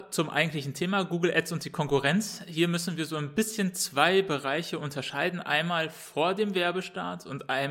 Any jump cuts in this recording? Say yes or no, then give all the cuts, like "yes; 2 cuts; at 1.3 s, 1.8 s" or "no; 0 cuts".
no; 0 cuts